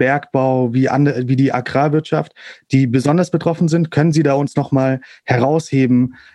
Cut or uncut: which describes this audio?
uncut